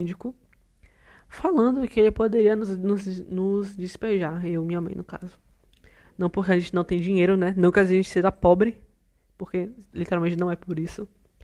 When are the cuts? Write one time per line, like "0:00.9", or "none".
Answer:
none